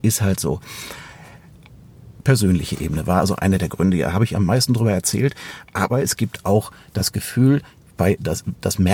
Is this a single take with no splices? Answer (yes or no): no